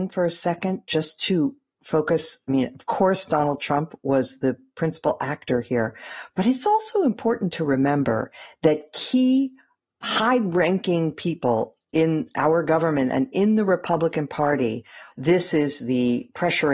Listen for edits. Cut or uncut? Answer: cut